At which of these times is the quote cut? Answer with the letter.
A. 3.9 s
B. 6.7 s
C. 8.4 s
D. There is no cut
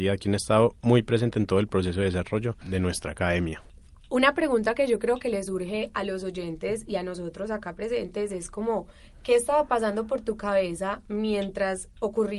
D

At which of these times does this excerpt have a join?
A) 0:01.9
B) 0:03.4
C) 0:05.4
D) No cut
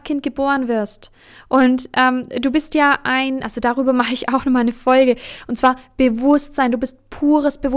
B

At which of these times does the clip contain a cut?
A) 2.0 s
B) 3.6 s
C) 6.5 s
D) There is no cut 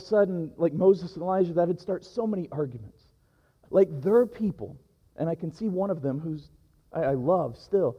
B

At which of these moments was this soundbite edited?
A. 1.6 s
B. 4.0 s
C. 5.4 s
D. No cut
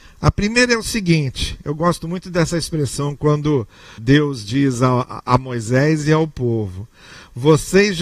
B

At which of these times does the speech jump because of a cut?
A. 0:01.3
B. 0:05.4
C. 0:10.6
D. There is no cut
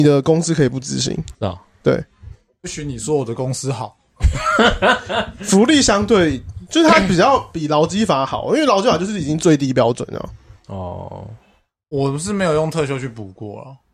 A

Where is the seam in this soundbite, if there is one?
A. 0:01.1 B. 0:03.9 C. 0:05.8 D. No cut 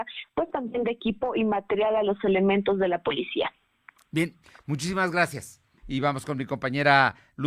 C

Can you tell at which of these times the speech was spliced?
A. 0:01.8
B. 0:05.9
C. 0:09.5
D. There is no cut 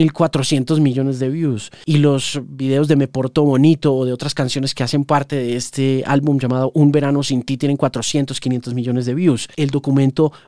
D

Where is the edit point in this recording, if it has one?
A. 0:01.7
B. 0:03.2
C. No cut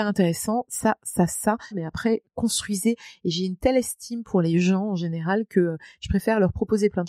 A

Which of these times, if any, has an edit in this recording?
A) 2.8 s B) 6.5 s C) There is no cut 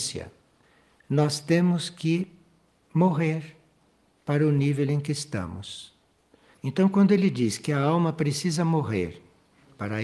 B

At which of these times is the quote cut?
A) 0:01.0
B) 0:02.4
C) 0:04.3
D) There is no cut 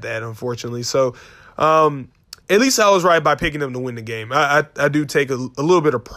B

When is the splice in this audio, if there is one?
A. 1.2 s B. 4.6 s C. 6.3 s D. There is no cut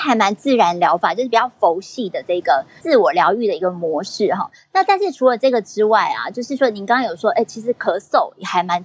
D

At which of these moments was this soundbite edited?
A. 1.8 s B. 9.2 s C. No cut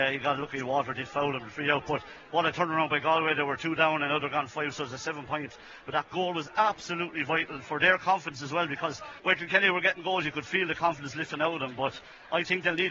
B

